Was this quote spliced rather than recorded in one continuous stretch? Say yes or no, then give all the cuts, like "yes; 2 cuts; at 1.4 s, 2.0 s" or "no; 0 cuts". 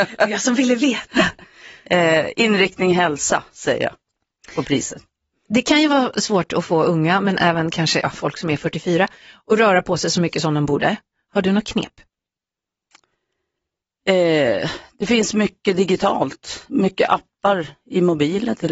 no; 0 cuts